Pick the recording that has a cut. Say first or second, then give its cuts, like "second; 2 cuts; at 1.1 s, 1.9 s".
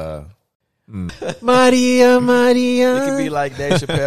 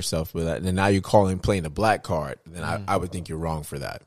first; 1 cut; at 1.1 s